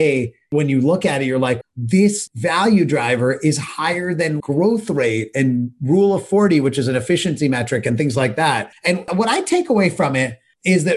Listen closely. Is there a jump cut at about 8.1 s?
no; 2 cuts; at 1.6 s, 4.4 s

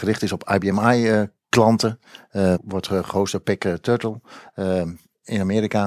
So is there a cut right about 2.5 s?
yes; 1 cut; at 2.5 s

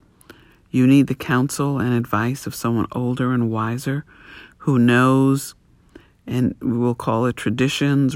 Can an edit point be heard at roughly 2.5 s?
no; 1 cut; at 6.6 s

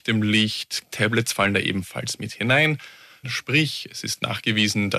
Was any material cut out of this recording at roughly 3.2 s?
yes; 2 cuts; at 0.9 s, 3.2 s

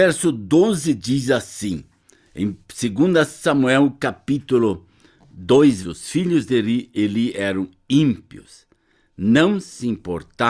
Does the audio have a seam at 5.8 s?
yes; 1 cut; at 5.8 s

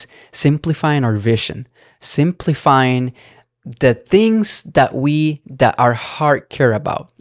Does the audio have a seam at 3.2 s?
no; 0 cuts

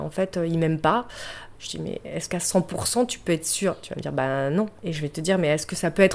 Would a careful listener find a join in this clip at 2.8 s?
no; 2 cuts; at 1.5 s, 4.8 s

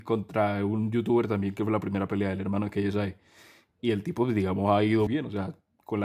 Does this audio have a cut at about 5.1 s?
yes; 1 cut; at 5.1 s

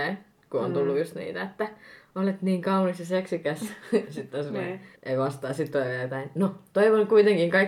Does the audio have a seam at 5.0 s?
yes; 1 cut; at 5.0 s

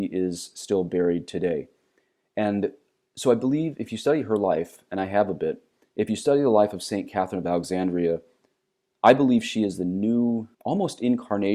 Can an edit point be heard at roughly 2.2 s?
no; 1 cut; at 10.5 s

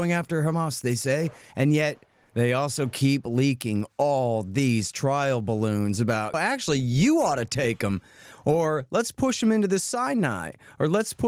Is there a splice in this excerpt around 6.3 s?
yes; 1 cut; at 6.3 s

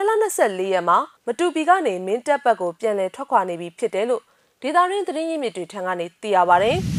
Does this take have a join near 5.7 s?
no; 1 cut; at 1.2 s

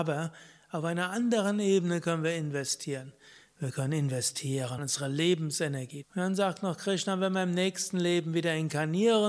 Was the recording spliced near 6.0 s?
yes; 2 cuts; at 4.8 s, 6.0 s

